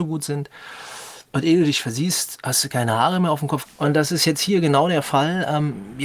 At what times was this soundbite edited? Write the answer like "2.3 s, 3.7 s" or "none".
3.7 s